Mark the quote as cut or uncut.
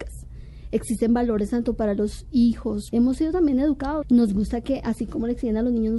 cut